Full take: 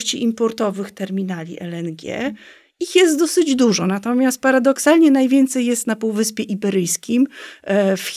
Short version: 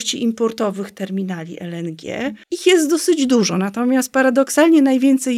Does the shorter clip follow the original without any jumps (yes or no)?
no